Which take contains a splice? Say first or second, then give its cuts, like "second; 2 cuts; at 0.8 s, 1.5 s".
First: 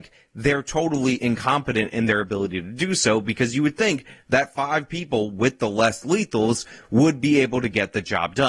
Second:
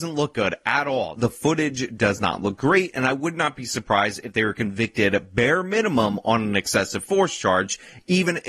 second; 1 cut; at 1.2 s